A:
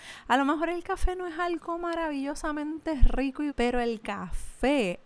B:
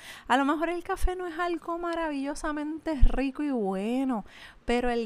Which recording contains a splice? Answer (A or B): A